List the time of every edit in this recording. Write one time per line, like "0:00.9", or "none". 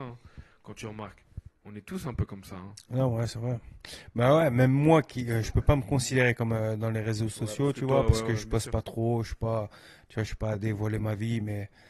none